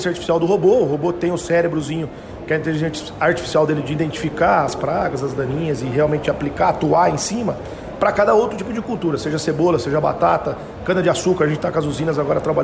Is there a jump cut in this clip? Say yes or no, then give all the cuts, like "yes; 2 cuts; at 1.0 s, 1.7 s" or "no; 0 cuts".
no; 0 cuts